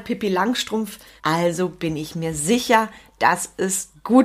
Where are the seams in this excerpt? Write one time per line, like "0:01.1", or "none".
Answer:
0:01.2